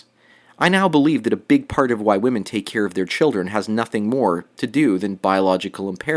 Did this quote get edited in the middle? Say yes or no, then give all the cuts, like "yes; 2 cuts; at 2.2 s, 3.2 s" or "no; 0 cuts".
no; 0 cuts